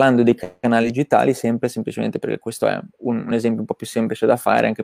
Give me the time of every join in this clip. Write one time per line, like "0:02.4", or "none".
0:02.9

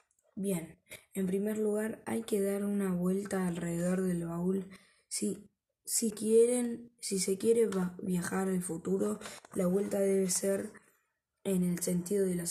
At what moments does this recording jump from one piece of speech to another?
0:06.1

